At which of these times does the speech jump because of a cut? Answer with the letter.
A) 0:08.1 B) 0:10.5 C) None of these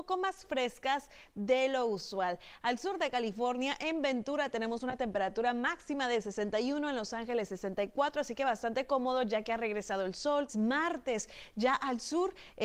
B